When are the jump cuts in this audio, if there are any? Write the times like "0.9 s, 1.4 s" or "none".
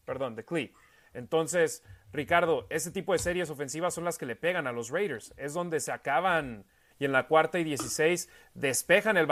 6.9 s